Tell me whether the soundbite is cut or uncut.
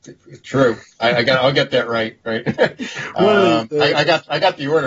uncut